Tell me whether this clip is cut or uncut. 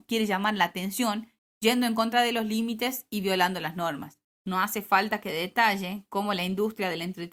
cut